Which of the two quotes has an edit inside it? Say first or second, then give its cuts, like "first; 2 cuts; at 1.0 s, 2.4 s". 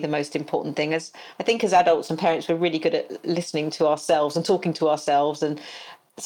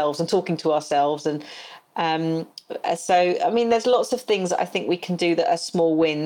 second; 1 cut; at 1.9 s